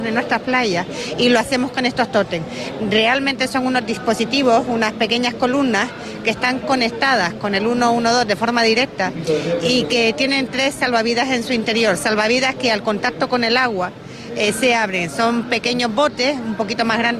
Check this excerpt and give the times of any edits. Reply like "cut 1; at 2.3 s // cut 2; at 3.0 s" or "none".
none